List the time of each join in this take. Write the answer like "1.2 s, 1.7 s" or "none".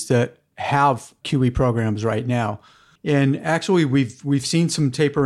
3.0 s

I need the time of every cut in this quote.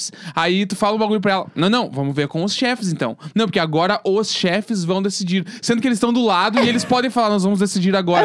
none

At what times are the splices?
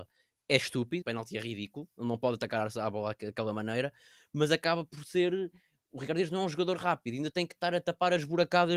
1.0 s

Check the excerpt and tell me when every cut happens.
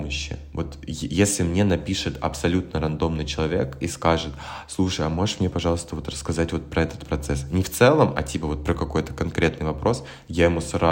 none

